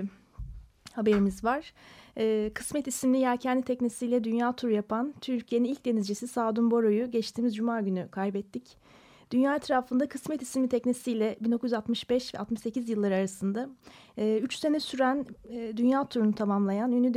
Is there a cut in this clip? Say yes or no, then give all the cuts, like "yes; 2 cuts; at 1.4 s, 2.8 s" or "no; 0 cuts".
no; 0 cuts